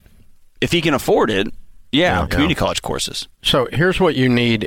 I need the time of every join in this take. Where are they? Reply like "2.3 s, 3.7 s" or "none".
2.3 s